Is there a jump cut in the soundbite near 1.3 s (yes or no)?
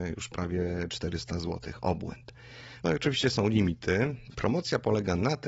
no